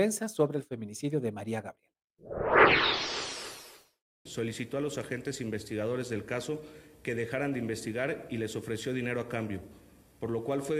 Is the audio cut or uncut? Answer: cut